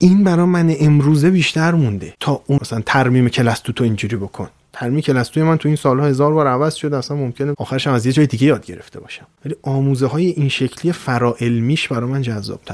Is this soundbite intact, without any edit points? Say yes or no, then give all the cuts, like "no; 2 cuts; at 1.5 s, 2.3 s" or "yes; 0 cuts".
no; 1 cut; at 2.6 s